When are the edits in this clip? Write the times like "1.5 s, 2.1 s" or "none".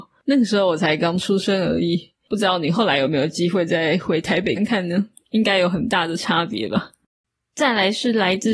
4.6 s